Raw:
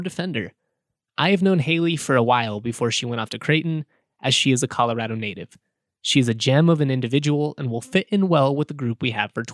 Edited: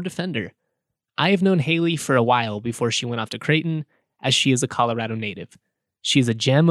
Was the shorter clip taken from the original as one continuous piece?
yes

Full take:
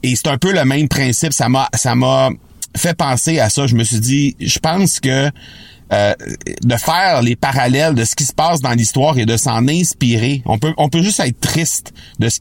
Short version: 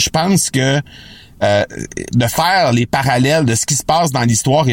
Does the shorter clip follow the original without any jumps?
yes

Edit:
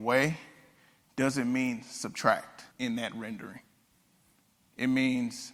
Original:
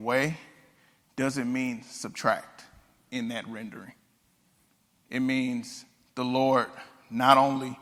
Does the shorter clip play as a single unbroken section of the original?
no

